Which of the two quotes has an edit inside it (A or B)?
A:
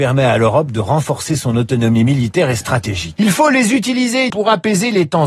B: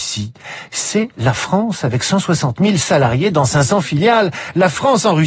A